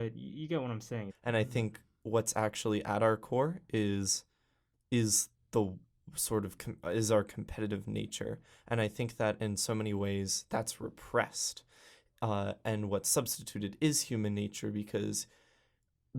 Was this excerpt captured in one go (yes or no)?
no